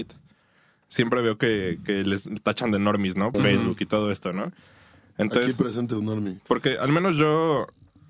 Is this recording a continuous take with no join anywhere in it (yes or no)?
no